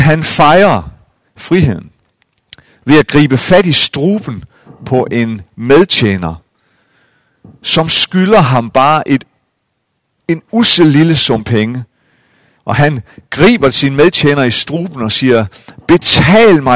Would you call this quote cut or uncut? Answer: cut